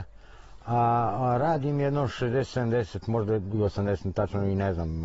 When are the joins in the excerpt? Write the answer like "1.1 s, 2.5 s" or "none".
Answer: none